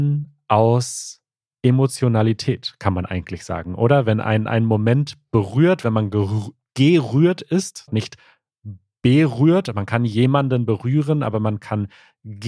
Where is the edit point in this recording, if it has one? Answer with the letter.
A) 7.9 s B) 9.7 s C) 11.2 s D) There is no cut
A